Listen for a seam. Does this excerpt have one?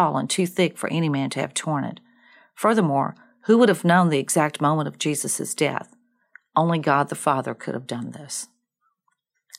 no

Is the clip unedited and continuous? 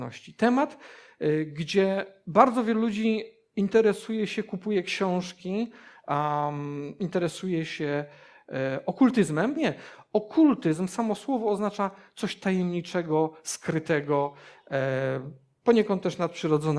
no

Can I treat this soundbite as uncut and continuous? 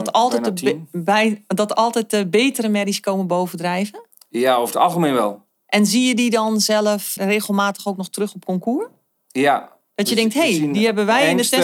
no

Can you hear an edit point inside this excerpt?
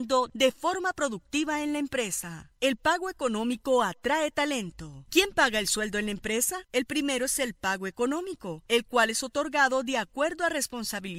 yes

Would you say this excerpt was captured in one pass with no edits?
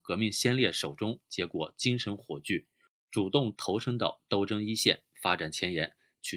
yes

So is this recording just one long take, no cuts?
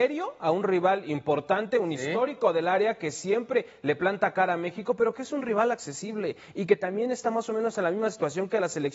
yes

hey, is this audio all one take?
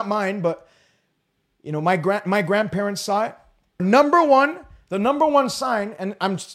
no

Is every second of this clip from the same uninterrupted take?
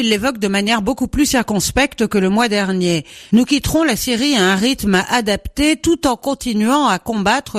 yes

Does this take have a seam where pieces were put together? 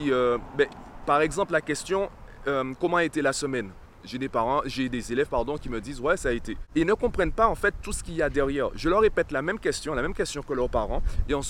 no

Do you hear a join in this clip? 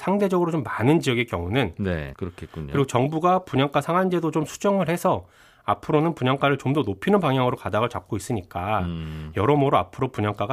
yes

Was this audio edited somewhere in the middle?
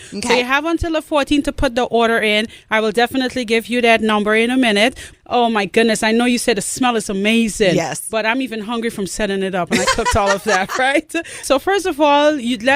yes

